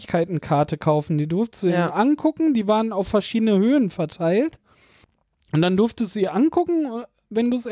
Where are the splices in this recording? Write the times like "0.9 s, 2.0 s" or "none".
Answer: none